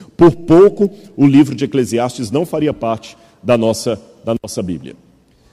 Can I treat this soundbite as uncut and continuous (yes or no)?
yes